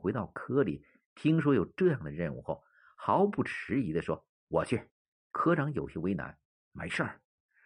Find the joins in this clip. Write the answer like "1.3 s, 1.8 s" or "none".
5.1 s